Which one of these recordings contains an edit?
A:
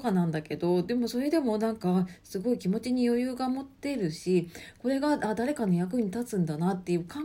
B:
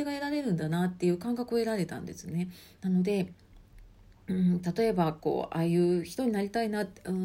B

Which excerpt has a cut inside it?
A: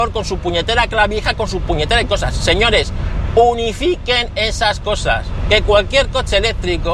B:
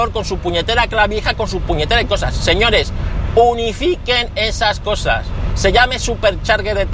B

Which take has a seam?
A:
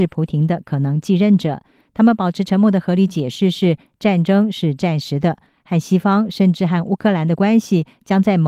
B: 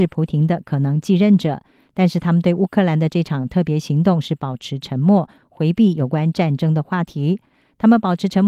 A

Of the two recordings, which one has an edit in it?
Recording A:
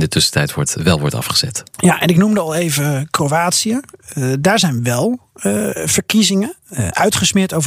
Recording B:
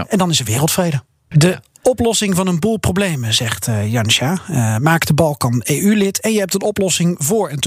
B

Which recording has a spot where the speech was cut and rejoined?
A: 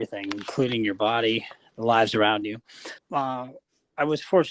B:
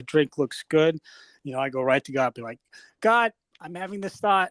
A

